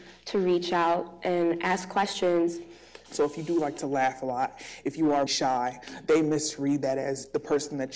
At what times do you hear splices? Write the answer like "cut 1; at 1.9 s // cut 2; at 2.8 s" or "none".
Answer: cut 1; at 3.1 s // cut 2; at 5.3 s